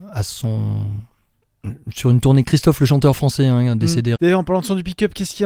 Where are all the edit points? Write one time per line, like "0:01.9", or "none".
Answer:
0:04.2